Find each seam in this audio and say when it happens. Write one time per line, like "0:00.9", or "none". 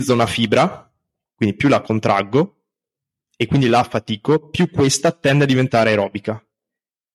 none